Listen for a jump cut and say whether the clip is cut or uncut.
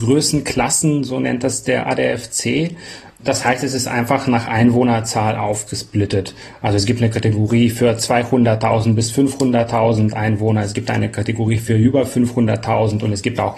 uncut